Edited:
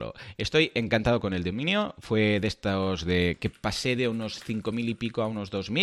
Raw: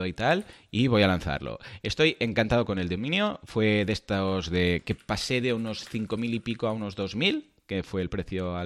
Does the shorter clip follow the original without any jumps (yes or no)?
yes